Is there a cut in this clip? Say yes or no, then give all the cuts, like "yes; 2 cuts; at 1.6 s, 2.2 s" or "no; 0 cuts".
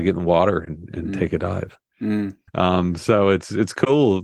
yes; 1 cut; at 2.5 s